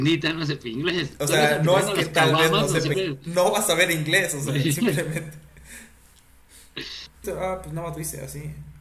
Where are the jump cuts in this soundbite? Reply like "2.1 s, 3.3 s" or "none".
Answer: 2.9 s, 7.2 s